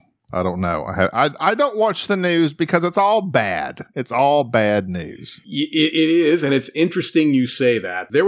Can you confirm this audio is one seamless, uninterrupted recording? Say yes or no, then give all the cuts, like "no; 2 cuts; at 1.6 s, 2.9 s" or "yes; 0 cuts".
yes; 0 cuts